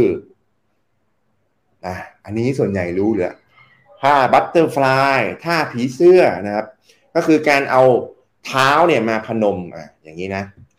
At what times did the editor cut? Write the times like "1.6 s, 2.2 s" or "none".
none